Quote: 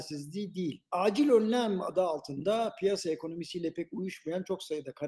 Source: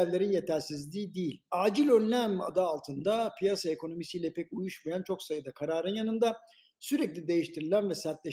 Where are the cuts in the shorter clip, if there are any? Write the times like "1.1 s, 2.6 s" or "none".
none